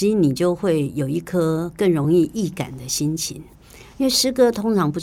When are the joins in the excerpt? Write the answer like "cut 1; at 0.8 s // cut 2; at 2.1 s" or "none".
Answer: none